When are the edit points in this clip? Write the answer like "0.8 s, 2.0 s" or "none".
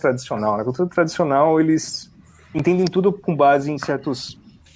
none